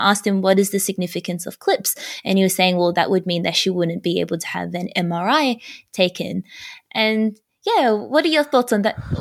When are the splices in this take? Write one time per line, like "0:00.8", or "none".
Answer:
none